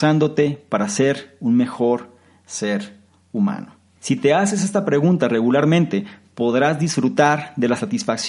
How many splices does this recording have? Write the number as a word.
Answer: one